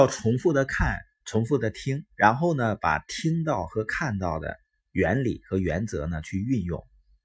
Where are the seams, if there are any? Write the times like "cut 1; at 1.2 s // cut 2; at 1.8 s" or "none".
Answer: none